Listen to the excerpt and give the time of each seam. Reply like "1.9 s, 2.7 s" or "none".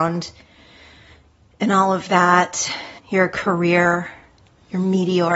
3.0 s